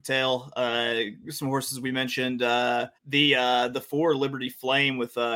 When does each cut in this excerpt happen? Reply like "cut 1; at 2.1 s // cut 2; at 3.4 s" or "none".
cut 1; at 3.0 s